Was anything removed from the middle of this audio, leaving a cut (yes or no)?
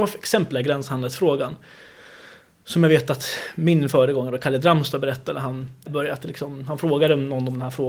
yes